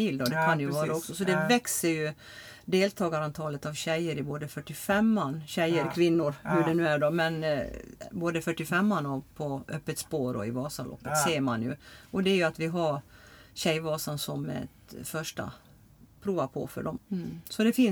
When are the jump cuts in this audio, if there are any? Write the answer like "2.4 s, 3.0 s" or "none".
17.0 s